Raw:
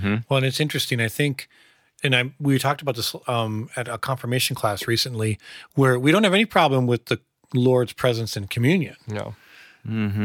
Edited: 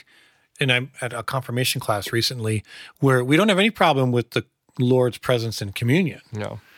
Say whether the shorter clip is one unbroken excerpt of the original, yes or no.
no